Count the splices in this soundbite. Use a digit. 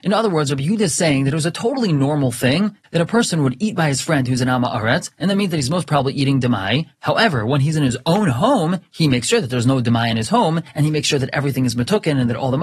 0